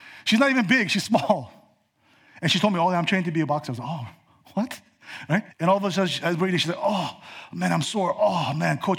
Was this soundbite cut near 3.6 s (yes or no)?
no